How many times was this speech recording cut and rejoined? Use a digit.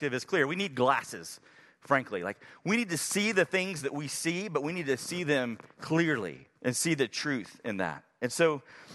1